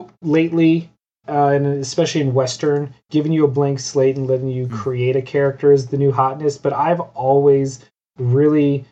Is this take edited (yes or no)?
no